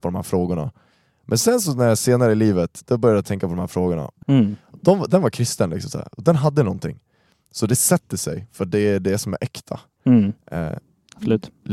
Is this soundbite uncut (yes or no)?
no